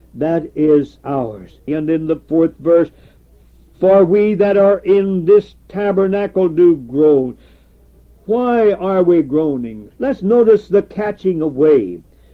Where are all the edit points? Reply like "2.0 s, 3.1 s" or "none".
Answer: 1.7 s, 9.9 s